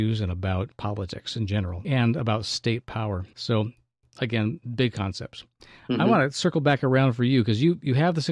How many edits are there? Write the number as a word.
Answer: zero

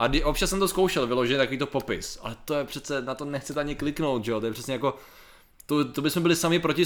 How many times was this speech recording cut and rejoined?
zero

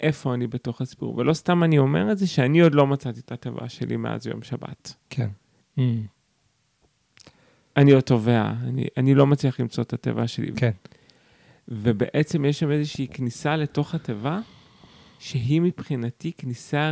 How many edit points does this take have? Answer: two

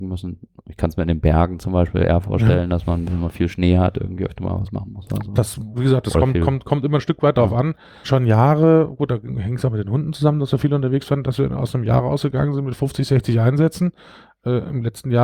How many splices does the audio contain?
one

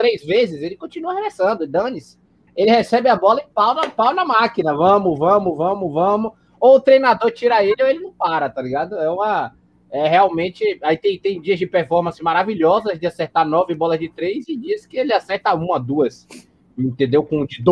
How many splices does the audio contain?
zero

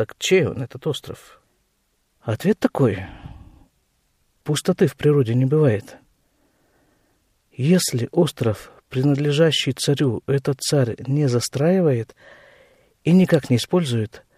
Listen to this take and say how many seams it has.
zero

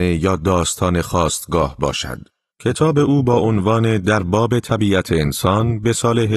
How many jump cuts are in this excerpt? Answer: one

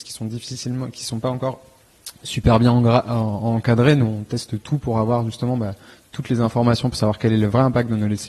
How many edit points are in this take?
zero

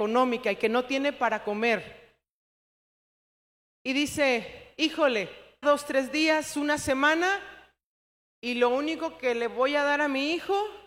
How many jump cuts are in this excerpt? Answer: one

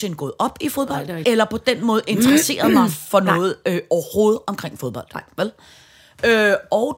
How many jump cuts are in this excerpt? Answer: one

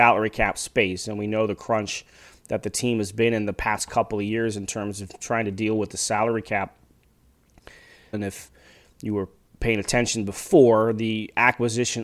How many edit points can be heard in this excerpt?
one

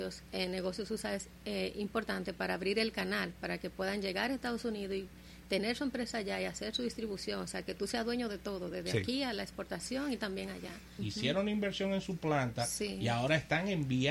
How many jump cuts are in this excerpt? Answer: one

